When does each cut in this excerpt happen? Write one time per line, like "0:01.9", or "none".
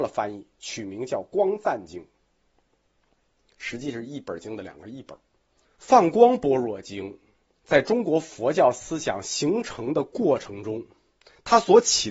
0:05.6